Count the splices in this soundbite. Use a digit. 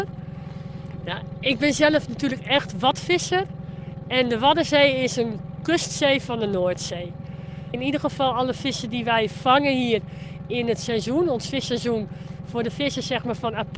2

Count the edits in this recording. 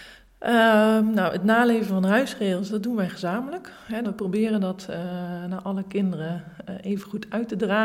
1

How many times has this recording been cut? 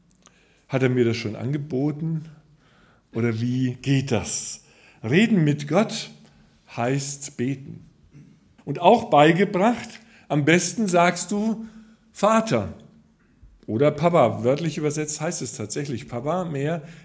1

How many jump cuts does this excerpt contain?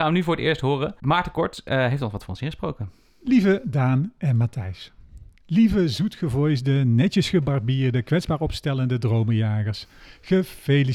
0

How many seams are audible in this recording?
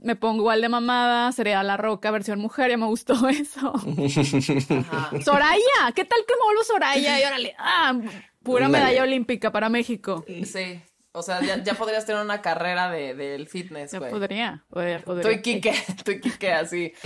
0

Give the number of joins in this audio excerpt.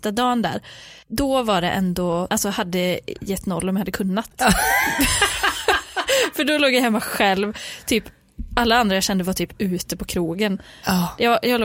2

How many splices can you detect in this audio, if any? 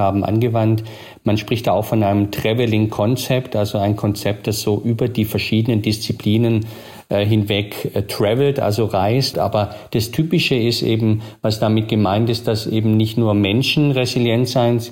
0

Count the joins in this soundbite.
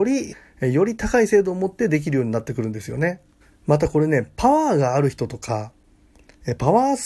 0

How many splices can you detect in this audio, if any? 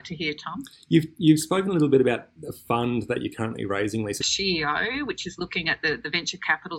1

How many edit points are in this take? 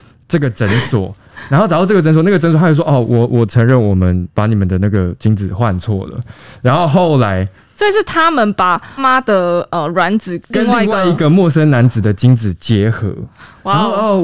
2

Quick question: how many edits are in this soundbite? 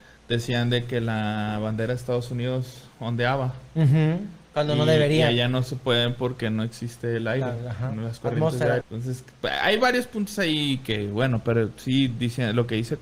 1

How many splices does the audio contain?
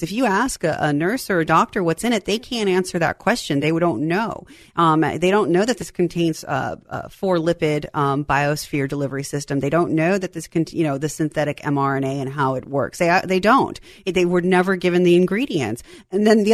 0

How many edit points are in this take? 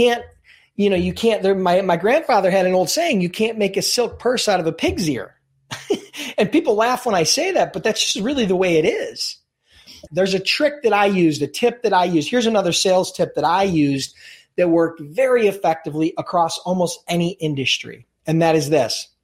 1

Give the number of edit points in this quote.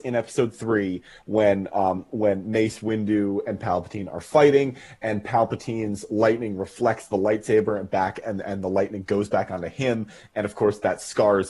0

